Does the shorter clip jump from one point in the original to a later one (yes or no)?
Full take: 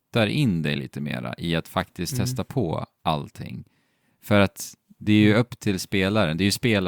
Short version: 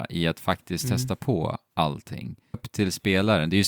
yes